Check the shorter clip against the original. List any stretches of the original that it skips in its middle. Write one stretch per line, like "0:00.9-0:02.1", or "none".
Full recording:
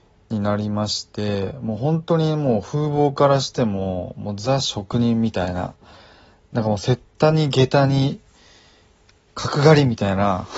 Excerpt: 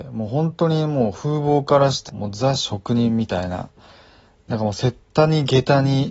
0:03.6-0:04.1